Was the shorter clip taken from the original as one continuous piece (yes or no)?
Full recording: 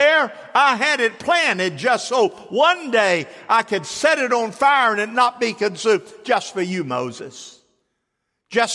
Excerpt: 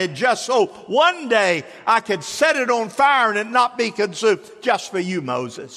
yes